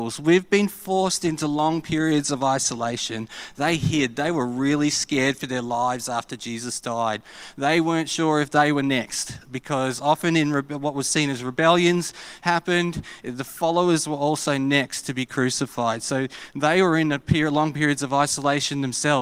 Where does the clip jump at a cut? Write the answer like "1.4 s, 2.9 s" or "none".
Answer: none